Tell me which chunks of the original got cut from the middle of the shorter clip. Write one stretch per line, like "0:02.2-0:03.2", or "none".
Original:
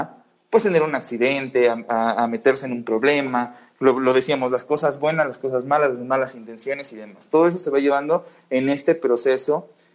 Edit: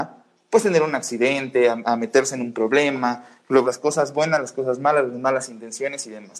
0:01.8-0:02.2
0:03.9-0:04.5